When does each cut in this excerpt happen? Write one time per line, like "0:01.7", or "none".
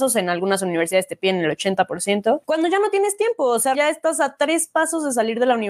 0:03.7